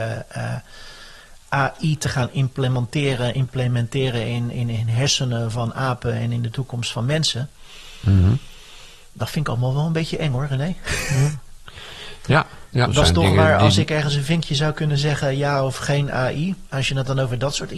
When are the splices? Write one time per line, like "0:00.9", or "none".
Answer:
0:12.9